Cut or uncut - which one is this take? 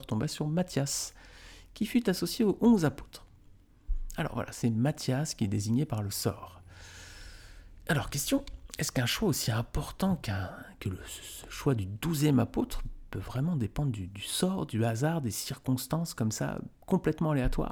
uncut